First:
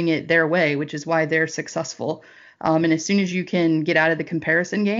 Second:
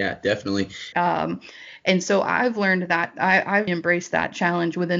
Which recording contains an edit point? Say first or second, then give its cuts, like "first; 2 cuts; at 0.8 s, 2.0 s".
second; 2 cuts; at 0.9 s, 3.7 s